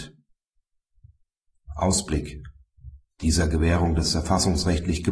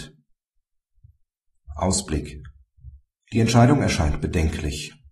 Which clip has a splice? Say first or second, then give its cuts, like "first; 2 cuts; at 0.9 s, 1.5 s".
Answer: first; 1 cut; at 3.1 s